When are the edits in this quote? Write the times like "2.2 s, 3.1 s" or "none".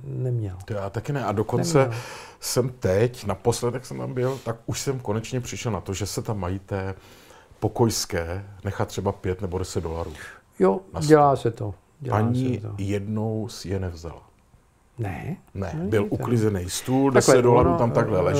none